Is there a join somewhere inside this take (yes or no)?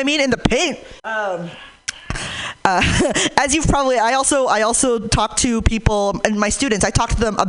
yes